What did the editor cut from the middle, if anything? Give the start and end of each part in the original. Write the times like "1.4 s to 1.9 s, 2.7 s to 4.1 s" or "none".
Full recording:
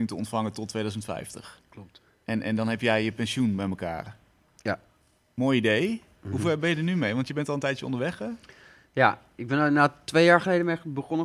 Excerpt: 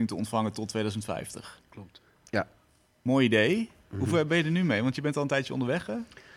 2.1 s to 4.5 s

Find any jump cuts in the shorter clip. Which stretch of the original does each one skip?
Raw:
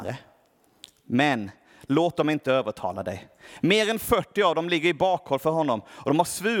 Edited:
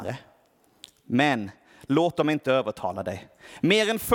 none

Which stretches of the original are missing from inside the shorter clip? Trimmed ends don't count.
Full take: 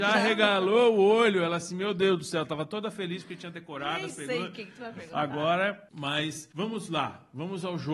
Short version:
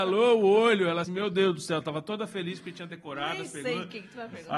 1.6 s to 1.7 s

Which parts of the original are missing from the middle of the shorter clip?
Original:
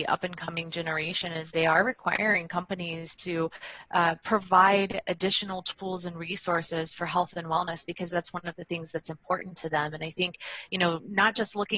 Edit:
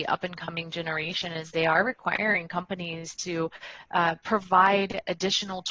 none

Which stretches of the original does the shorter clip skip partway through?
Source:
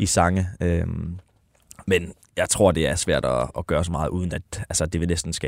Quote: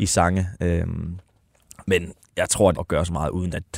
2.7 s to 3.5 s

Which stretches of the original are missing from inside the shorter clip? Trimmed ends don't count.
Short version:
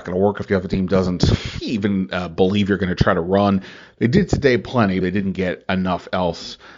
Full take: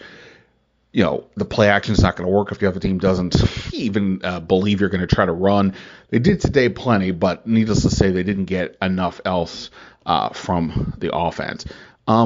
7.1 s to 8.1 s

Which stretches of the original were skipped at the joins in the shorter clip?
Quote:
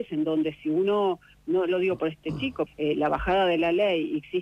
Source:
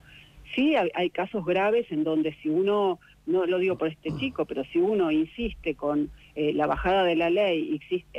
4.5 s to 6.2 s

